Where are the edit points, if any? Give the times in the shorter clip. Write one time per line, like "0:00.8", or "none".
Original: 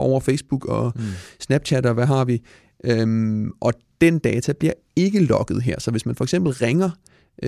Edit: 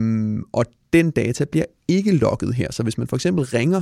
none